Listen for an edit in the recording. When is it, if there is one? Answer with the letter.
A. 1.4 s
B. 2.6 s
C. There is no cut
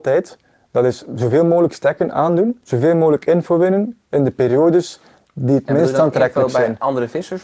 B